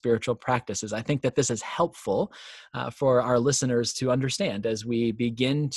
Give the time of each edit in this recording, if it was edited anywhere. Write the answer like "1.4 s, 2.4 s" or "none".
none